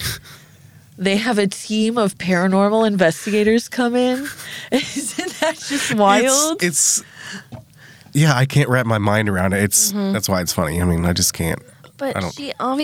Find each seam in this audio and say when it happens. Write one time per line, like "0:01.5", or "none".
none